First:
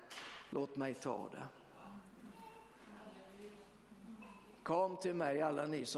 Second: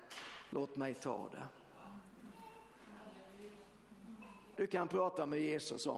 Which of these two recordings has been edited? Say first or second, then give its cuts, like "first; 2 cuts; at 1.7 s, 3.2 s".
second; 1 cut; at 4.6 s